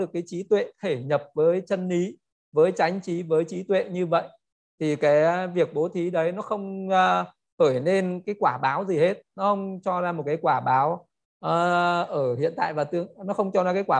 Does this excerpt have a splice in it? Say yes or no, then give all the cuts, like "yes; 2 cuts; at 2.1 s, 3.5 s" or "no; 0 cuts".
yes; 1 cut; at 8.2 s